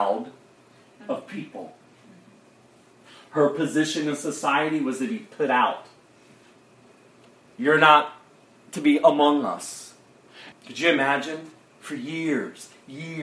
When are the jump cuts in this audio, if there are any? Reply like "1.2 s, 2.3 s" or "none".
10.5 s